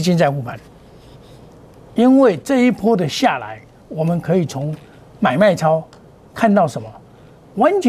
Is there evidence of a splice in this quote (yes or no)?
no